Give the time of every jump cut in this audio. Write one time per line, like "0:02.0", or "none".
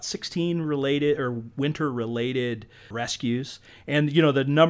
0:02.9